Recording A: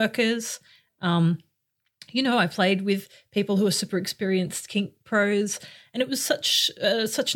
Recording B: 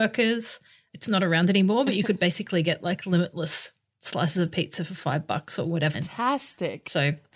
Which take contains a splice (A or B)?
B